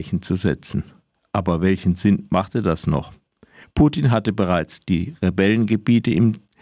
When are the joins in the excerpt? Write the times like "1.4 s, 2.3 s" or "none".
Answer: none